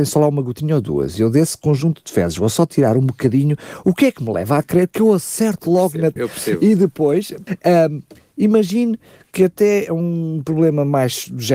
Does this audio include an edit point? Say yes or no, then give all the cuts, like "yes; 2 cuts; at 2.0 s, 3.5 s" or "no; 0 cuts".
yes; 2 cuts; at 6.2 s, 7.5 s